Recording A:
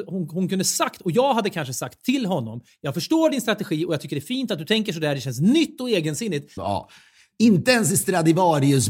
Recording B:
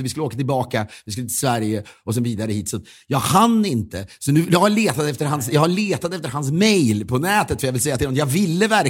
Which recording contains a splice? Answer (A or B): A